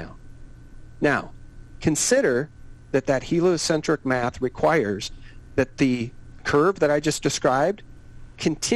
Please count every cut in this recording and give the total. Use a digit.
0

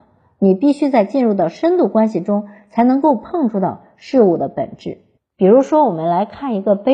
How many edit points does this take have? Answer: 0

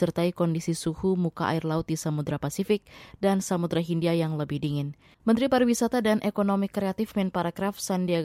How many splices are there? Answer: 1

